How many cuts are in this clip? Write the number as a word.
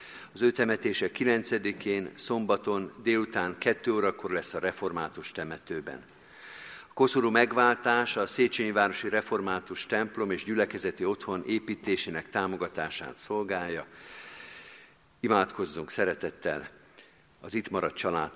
zero